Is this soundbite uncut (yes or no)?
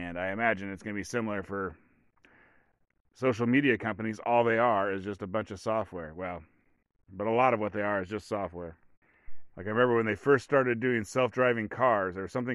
no